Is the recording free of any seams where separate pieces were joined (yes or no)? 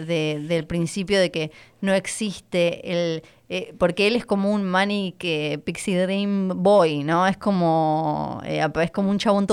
yes